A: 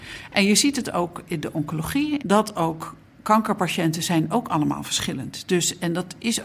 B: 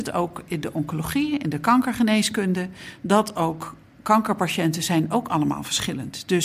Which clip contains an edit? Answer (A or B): A